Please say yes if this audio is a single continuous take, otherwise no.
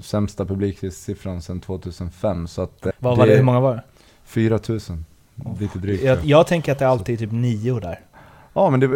no